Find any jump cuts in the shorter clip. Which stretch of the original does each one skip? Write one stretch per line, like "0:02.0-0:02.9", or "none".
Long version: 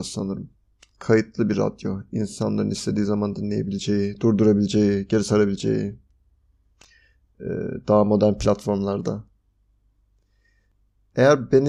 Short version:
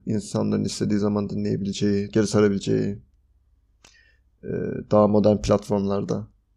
0:04.2-0:05.1